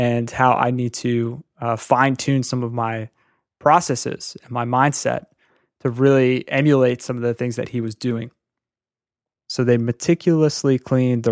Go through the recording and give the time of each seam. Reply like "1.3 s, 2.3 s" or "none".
9.4 s